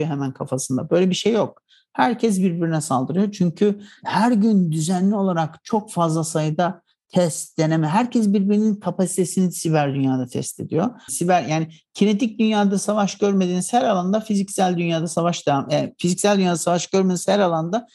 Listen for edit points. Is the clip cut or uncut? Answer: cut